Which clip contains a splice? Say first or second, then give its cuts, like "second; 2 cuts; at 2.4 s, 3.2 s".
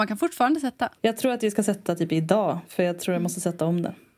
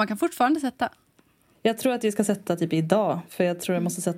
first; 1 cut; at 1.0 s